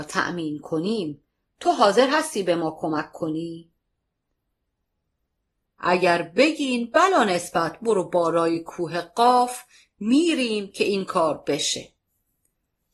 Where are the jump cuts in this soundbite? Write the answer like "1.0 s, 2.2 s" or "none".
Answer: 5.6 s